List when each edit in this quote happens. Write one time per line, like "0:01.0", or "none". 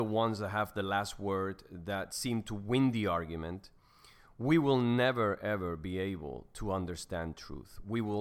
none